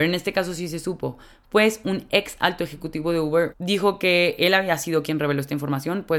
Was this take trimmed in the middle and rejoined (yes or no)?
yes